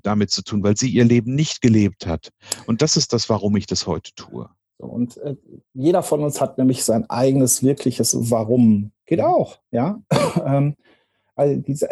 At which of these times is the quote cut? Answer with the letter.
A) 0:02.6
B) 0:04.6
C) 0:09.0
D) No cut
C